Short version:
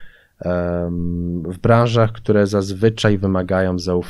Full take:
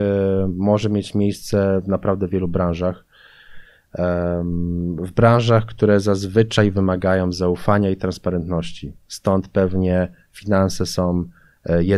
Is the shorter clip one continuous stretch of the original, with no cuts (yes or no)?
yes